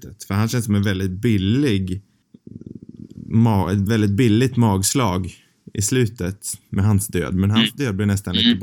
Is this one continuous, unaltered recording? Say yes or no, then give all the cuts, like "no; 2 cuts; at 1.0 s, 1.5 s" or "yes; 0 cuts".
yes; 0 cuts